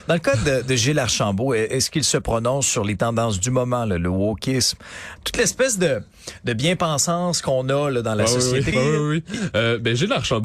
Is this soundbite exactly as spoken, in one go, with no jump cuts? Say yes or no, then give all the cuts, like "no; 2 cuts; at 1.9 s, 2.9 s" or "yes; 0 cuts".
no; 2 cuts; at 5.2 s, 8.7 s